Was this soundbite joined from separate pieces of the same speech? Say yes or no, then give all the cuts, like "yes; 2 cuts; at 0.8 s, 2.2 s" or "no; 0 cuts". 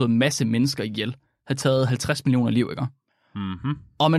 no; 0 cuts